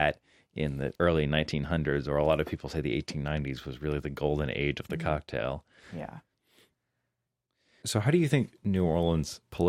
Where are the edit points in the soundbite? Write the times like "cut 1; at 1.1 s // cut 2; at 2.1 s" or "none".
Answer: none